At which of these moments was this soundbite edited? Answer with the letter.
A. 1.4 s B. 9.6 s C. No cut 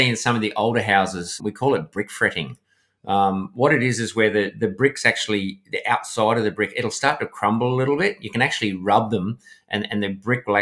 A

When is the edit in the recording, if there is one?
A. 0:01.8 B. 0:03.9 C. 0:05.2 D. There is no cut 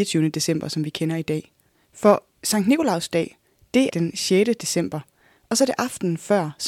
B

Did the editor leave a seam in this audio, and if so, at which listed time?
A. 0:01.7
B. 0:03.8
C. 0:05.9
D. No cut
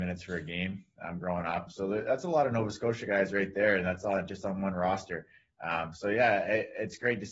A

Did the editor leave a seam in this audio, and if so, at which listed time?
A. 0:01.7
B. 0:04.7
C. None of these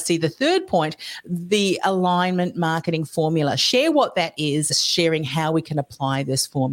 B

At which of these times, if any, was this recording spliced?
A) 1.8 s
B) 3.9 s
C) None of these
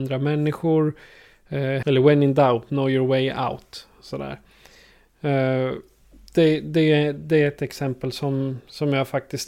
A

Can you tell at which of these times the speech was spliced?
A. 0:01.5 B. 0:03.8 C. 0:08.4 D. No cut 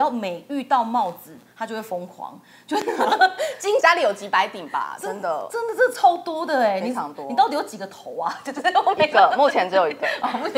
B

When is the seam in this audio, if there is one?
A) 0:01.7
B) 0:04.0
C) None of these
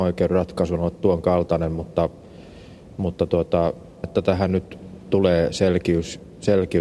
B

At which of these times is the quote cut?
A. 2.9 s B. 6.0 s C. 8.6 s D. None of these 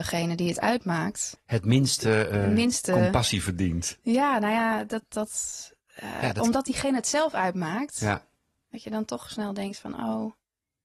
D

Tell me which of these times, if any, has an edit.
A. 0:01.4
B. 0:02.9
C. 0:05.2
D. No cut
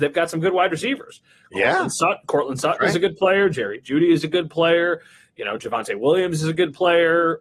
D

